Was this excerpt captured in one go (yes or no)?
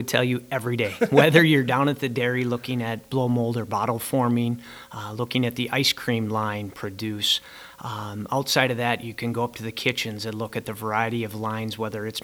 yes